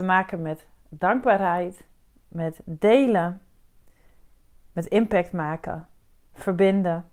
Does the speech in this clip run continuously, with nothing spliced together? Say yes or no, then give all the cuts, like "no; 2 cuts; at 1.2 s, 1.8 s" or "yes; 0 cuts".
no; 1 cut; at 2.2 s